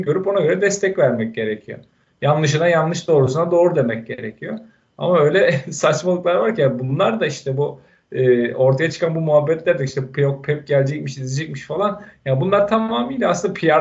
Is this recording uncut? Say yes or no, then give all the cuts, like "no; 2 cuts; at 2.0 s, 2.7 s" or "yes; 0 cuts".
yes; 0 cuts